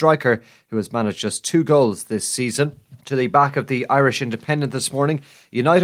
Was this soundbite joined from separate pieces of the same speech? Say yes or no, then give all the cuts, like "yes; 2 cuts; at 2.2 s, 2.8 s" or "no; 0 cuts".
yes; 1 cut; at 3.0 s